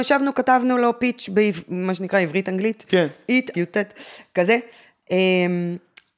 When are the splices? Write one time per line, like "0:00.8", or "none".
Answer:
0:03.5

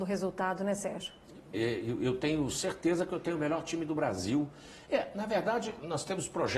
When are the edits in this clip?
0:01.5
0:04.8

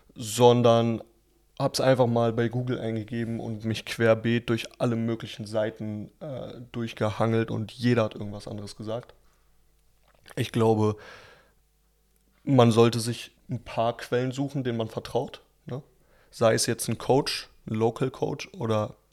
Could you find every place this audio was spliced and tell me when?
0:13.4

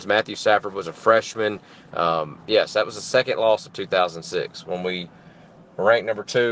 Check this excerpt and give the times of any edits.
0:01.9

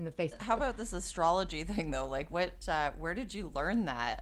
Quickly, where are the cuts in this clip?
0:02.6

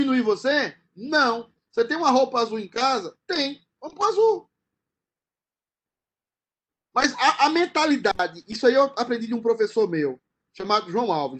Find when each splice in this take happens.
none

